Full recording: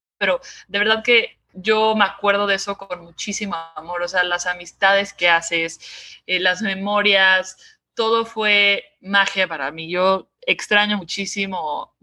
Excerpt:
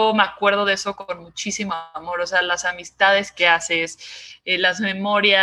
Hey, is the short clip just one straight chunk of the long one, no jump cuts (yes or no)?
yes